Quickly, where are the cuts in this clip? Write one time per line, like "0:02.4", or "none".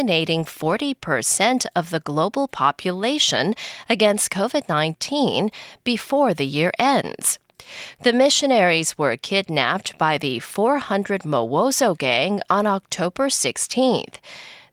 0:08.0